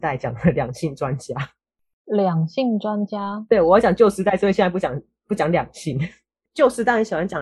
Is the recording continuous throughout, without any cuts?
yes; 0 cuts

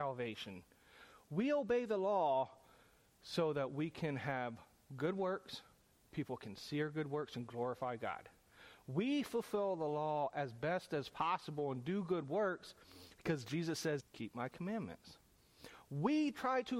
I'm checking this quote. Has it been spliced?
yes; 1 cut; at 14.0 s

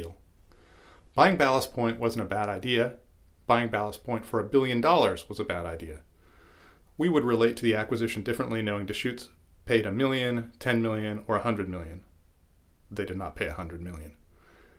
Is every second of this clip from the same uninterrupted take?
yes; 0 cuts

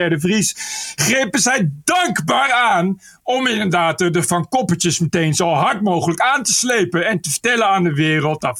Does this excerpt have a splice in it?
no; 0 cuts

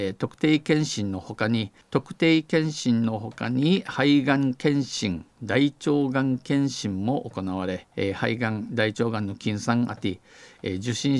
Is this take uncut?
no; 2 cuts; at 1.8 s, 7.9 s

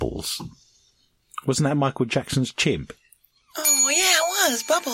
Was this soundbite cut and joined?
no; 0 cuts

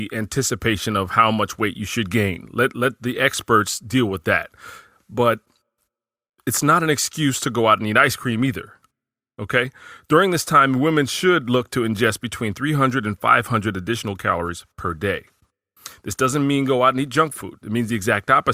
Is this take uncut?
yes; 0 cuts

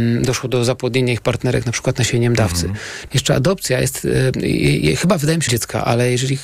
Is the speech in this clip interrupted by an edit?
yes; 2 cuts; at 3.1 s, 5.5 s

